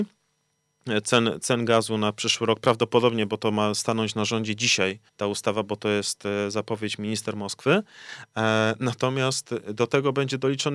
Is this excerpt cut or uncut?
cut